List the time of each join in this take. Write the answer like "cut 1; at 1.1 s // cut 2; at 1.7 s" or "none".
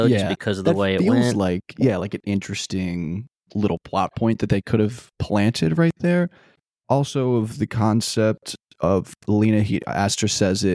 none